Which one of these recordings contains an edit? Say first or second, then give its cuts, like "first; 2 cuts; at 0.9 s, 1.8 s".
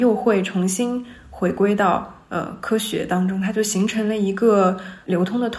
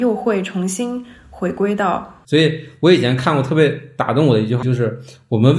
second; 2 cuts; at 2.2 s, 4.6 s